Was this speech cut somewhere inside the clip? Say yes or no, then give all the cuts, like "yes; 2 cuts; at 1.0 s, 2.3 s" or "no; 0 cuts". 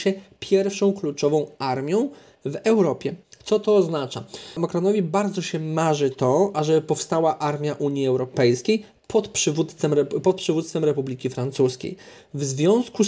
no; 0 cuts